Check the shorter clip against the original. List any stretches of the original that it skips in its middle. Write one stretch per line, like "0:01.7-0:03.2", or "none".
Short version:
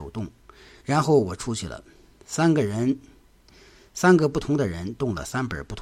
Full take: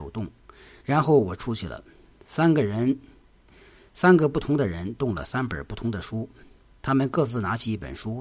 none

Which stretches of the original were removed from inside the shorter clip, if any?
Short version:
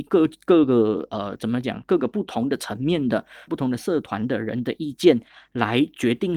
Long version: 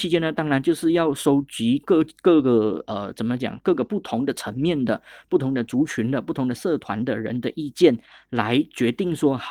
0:05.2-0:06.2

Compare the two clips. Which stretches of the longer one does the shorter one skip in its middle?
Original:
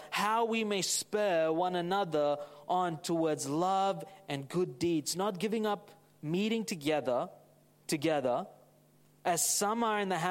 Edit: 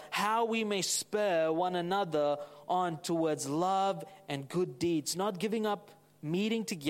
none

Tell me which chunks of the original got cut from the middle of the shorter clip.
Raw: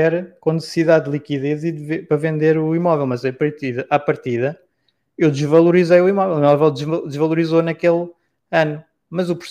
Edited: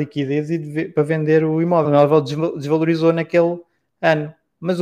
0:03.0-0:06.3

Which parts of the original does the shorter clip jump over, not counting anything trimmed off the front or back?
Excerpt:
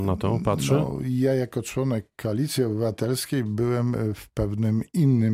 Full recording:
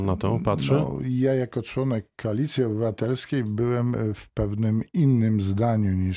none

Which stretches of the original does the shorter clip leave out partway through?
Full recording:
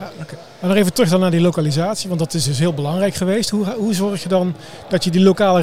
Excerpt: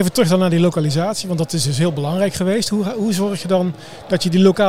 none

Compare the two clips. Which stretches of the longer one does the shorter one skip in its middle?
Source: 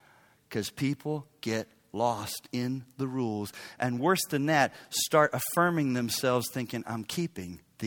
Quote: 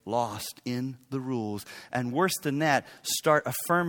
none

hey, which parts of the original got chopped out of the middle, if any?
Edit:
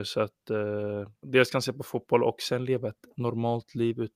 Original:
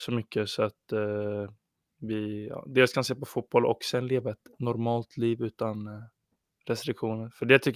0:01.6-0:02.6

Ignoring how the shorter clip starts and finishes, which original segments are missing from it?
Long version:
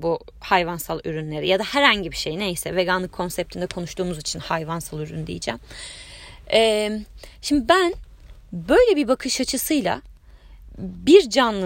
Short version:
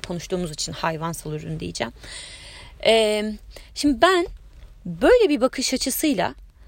none

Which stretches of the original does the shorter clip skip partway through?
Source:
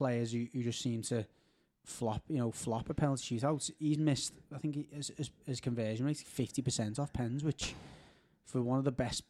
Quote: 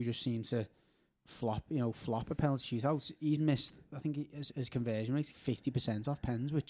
0:05.1-0:05.4

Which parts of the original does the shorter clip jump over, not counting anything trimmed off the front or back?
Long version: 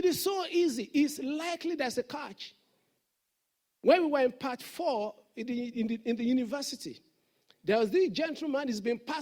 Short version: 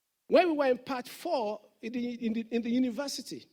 none

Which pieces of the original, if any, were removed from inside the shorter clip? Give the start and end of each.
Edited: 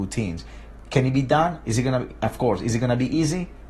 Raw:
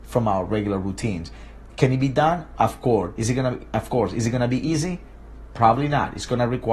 0:02.5-0:03.2

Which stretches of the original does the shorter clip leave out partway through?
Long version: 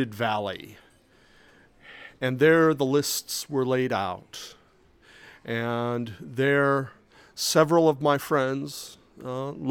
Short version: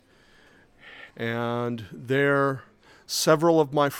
0:02.1-0:05.4

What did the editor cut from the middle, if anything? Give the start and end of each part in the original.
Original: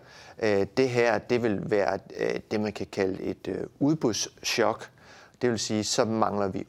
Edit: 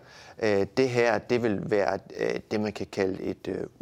none

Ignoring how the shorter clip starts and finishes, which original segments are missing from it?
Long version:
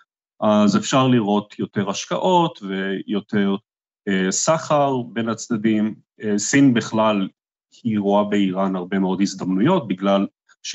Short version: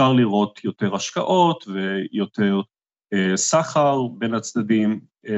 none

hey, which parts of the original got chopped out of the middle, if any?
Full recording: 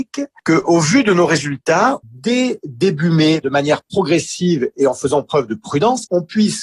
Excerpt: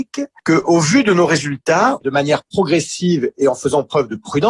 0:02.0-0:03.4

